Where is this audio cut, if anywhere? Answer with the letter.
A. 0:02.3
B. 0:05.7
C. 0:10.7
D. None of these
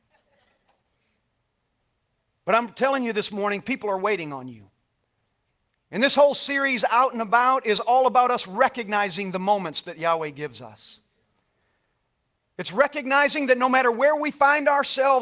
D